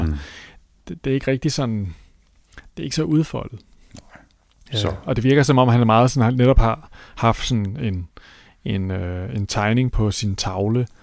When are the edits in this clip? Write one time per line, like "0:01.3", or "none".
none